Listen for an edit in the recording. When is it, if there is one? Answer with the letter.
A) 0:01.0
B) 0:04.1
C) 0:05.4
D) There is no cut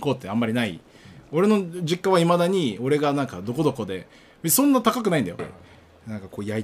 C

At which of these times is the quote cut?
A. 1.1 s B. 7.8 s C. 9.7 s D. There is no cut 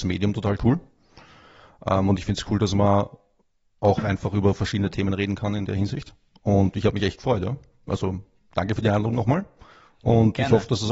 D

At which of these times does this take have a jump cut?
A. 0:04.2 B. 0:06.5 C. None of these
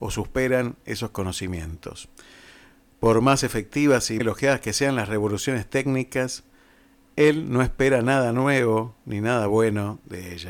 A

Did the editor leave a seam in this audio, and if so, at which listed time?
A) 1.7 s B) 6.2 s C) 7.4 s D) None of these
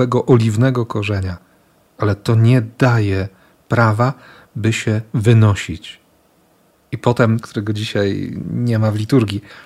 C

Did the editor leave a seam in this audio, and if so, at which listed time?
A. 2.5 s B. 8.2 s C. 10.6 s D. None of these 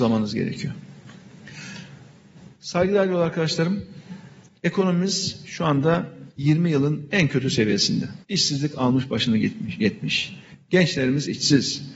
B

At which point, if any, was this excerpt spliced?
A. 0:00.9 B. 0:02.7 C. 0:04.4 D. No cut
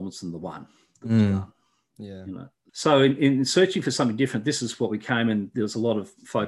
B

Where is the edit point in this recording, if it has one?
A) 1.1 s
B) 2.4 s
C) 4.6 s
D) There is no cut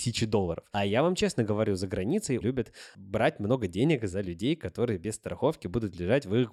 B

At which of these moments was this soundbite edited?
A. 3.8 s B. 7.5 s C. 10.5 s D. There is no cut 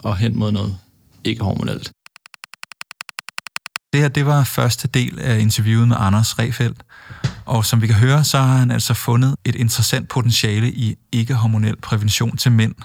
D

